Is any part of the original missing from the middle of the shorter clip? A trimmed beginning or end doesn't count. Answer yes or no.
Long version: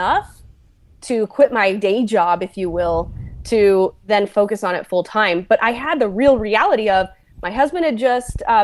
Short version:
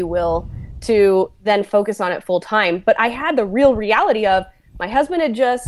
no